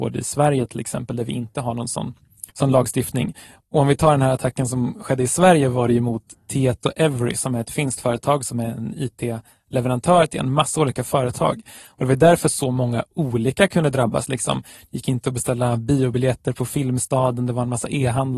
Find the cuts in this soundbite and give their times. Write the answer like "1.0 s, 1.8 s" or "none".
2.5 s

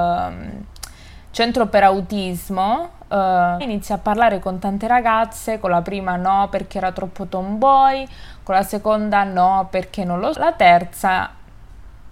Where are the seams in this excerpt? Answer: 3.6 s, 10.3 s

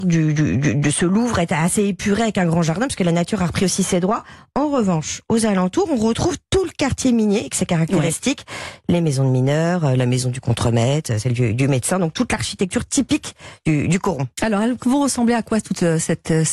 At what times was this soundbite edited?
none

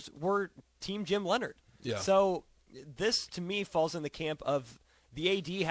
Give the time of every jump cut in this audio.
none

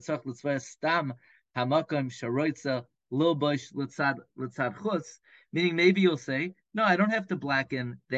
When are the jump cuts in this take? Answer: none

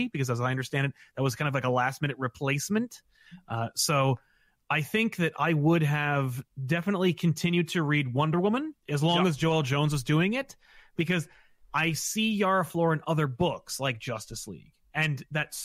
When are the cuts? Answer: 8.8 s

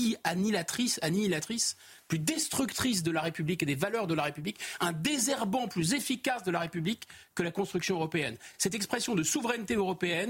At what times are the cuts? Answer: none

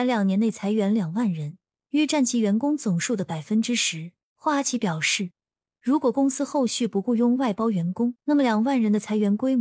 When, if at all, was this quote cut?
4.3 s, 8.2 s

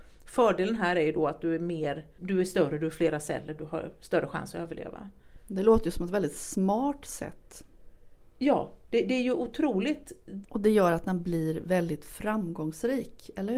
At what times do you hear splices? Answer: 2.2 s, 10.4 s

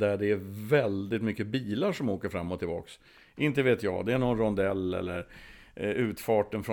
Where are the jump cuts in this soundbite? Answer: none

